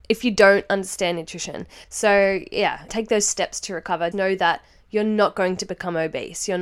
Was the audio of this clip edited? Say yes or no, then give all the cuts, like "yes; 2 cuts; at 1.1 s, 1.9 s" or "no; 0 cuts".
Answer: yes; 3 cuts; at 1.8 s, 2.9 s, 4.1 s